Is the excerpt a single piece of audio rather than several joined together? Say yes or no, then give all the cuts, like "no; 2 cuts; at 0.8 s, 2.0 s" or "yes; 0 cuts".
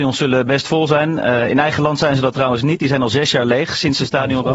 yes; 0 cuts